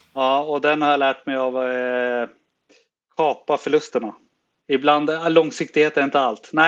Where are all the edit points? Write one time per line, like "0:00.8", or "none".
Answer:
none